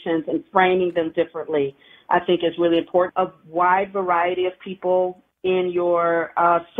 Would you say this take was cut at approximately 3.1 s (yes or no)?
yes